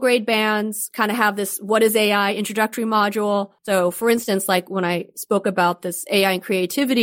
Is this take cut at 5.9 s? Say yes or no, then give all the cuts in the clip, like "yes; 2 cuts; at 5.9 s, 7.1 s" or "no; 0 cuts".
no; 1 cut; at 3.6 s